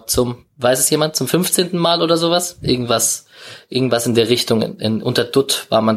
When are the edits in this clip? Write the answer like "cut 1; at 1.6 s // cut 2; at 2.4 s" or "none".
none